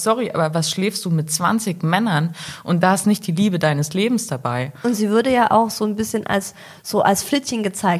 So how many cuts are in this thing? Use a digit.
0